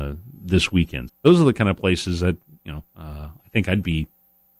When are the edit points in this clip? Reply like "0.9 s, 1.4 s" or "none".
1.1 s, 2.9 s